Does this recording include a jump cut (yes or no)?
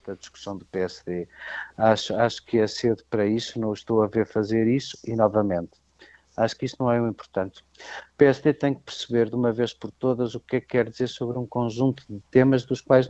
no